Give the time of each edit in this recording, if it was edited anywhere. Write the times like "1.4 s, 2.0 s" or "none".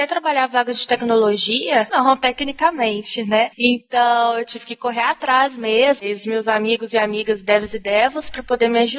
1.9 s, 6.0 s